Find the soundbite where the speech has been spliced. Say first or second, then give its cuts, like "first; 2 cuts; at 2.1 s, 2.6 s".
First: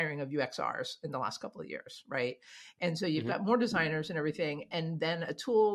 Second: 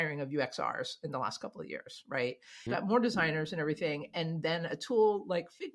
second; 1 cut; at 2.7 s